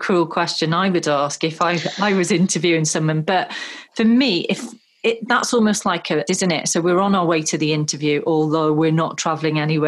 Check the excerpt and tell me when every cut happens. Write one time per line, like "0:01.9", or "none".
0:06.3